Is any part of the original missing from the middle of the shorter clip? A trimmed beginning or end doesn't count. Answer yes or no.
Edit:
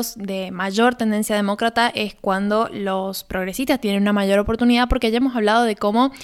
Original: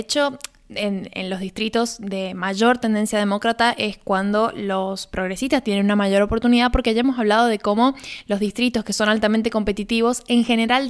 no